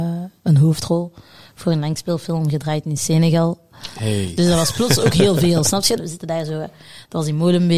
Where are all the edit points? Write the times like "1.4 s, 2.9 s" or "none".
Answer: 6.0 s